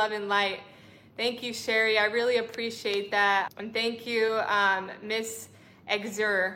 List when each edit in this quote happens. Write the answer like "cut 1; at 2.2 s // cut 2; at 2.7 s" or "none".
cut 1; at 3.5 s

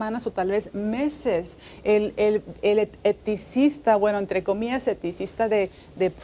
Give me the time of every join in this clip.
none

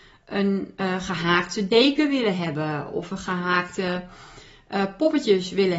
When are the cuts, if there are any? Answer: none

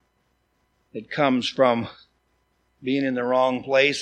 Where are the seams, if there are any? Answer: none

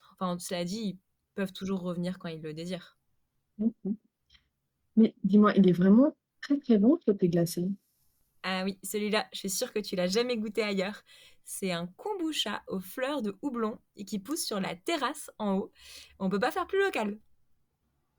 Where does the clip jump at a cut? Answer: none

